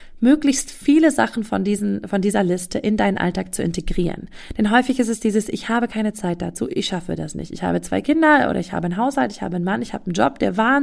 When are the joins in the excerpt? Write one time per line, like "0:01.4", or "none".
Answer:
none